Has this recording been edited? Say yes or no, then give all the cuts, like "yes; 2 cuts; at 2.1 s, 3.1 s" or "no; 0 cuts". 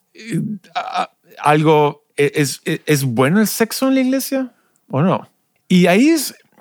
yes; 1 cut; at 5.6 s